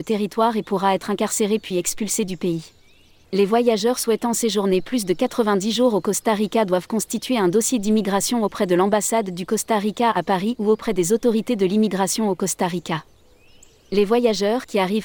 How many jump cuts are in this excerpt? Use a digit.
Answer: 1